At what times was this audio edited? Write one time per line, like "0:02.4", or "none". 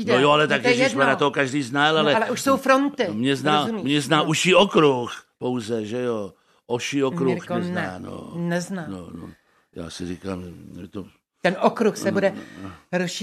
none